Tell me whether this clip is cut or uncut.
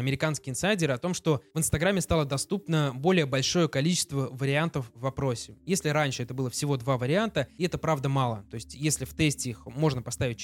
uncut